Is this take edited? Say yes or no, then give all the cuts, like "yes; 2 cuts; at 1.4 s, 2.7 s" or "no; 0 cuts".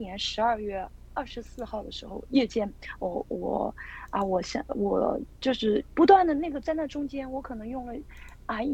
no; 0 cuts